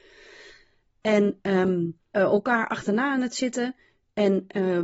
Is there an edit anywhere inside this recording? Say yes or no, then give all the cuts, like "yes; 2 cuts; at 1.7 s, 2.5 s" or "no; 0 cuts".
yes; 1 cut; at 2.1 s